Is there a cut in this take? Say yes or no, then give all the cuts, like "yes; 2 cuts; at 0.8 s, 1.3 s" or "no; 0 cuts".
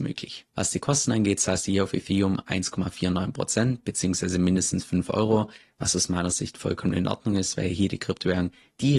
no; 0 cuts